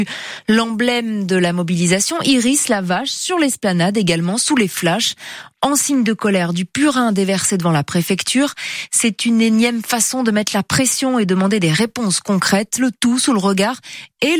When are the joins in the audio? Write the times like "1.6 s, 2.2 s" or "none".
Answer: none